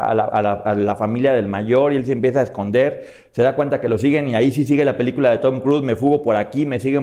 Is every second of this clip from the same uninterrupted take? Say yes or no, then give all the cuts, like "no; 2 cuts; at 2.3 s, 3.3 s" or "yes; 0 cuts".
yes; 0 cuts